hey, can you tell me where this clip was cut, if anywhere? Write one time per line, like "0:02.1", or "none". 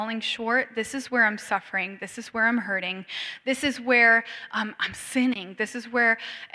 none